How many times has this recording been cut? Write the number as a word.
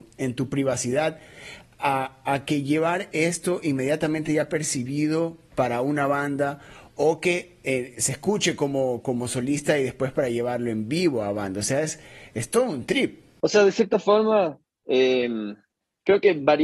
one